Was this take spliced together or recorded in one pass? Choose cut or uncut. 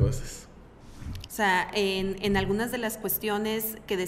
cut